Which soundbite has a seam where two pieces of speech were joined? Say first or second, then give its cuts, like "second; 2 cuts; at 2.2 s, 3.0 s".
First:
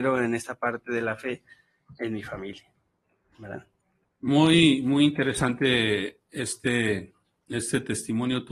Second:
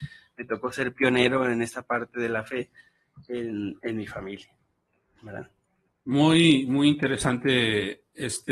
first; 1 cut; at 2.0 s